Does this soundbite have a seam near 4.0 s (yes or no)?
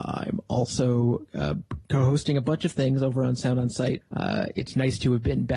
yes